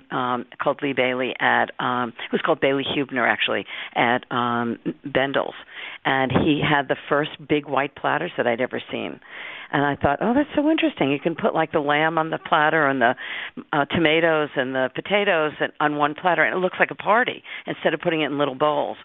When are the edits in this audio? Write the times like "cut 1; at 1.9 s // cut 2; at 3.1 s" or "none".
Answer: none